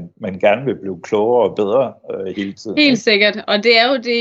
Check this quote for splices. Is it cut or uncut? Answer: uncut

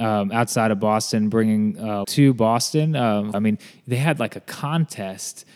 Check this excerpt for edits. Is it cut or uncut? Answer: cut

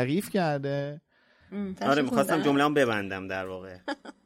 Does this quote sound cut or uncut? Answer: cut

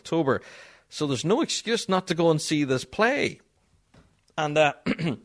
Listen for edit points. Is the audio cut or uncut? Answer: uncut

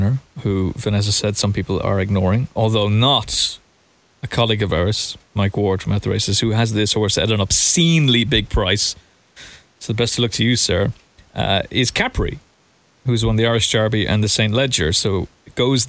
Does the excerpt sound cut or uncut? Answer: uncut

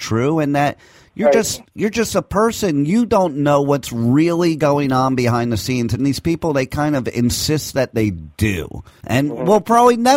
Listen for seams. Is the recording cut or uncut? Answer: uncut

